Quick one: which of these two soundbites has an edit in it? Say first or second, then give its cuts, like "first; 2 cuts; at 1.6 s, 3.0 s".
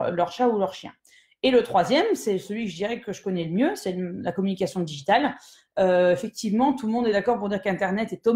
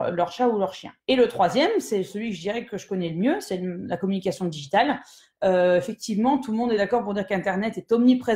second; 1 cut; at 1.0 s